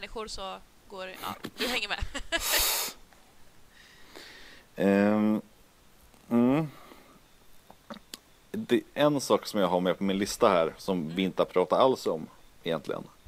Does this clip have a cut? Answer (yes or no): no